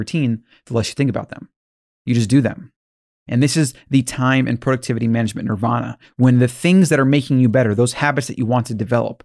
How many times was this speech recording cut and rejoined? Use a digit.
0